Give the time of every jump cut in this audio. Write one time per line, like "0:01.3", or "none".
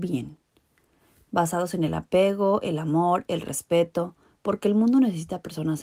none

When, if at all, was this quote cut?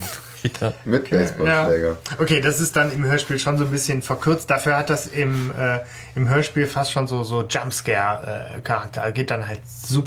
none

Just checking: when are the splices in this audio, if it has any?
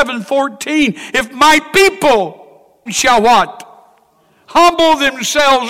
0:02.9

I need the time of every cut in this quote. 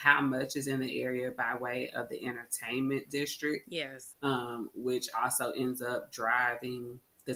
0:04.1

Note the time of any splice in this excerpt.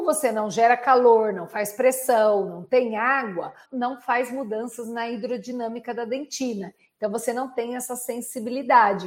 0:03.6

